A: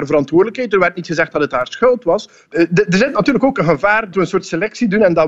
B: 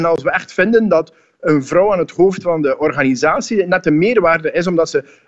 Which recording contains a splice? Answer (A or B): A